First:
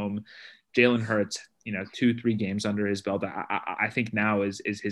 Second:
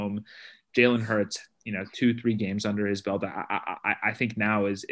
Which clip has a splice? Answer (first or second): first